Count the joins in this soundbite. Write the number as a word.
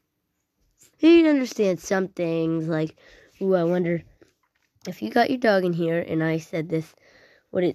one